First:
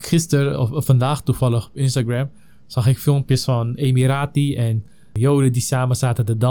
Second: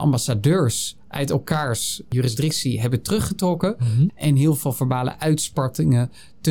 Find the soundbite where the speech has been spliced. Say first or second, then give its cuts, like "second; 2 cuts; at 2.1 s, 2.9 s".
second; 1 cut; at 4.1 s